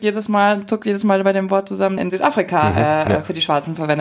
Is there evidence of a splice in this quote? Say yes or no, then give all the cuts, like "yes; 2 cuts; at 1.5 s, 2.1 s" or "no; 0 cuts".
yes; 1 cut; at 2.0 s